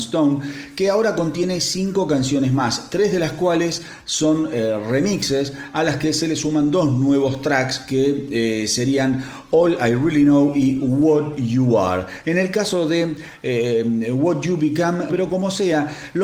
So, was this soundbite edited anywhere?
yes; 2 cuts; at 12.2 s, 15.1 s

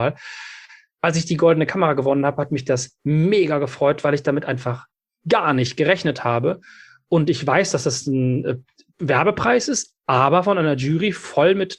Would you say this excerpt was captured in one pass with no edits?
yes; 0 cuts

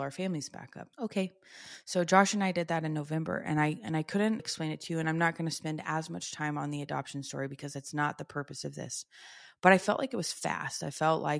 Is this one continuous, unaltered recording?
no; 2 cuts; at 0.9 s, 4.4 s

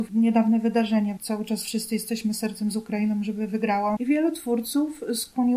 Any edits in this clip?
yes; 2 cuts; at 1.2 s, 4.0 s

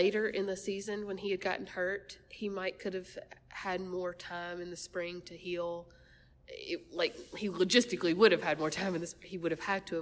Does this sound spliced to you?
no; 0 cuts

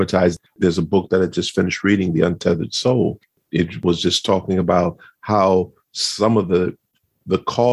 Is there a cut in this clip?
no; 0 cuts

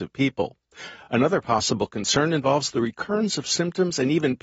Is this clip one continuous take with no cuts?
yes; 0 cuts

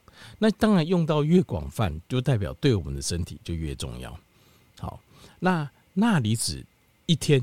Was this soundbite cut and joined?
no; 0 cuts

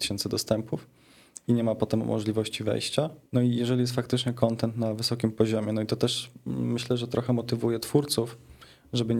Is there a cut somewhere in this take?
yes; 1 cut; at 3.3 s

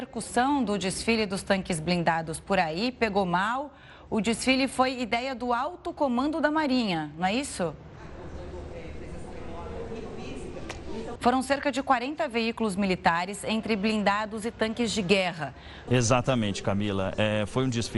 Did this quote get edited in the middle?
yes; 2 cuts; at 11.2 s, 15.9 s

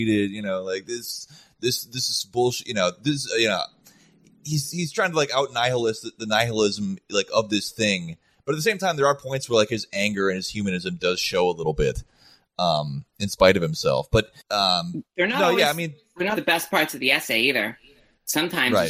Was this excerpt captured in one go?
no; 2 cuts; at 14.4 s, 16.3 s

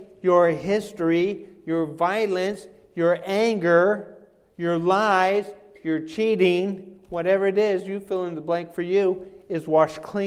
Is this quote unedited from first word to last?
yes; 0 cuts

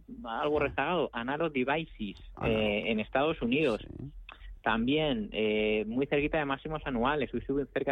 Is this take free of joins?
yes; 0 cuts

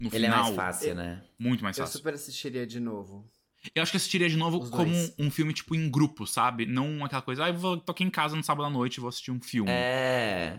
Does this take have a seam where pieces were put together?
no; 0 cuts

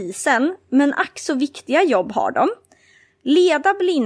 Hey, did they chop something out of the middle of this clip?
no; 0 cuts

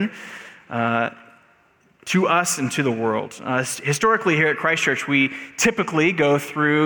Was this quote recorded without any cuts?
yes; 0 cuts

